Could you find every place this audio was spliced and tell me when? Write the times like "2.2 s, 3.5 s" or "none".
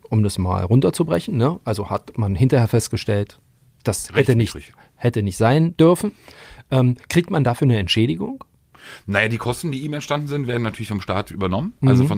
none